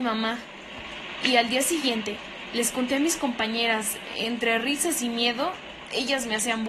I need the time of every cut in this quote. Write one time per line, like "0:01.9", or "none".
none